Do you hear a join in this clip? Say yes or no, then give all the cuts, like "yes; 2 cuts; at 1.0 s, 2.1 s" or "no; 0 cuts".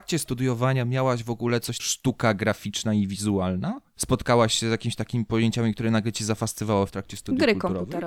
yes; 1 cut; at 1.8 s